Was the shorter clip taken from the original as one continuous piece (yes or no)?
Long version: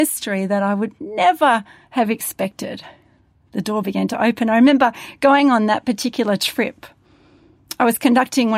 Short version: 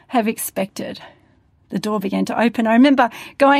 yes